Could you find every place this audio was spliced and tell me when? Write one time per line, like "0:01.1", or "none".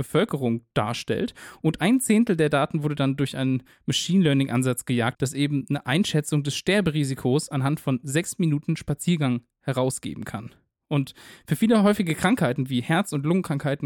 0:05.1